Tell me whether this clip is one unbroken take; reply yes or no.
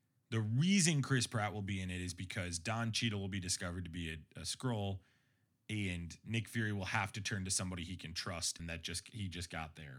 no